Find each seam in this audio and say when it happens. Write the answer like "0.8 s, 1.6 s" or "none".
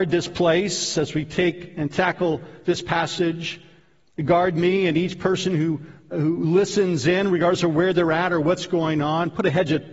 6.1 s